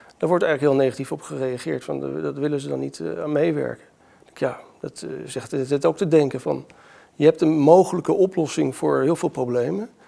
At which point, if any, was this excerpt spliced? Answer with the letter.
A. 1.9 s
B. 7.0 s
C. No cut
C